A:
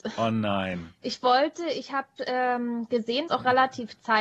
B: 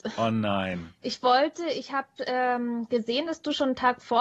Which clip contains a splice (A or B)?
A